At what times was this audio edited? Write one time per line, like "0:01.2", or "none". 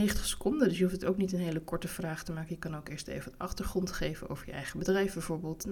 none